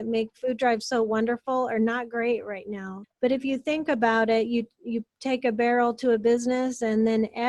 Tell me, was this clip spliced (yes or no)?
yes